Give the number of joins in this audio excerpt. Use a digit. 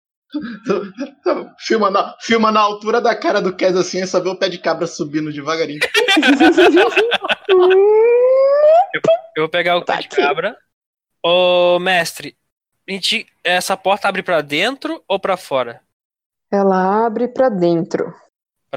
0